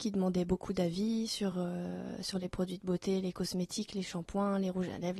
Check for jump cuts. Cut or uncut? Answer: uncut